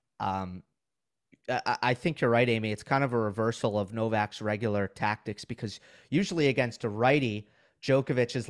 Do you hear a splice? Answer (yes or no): no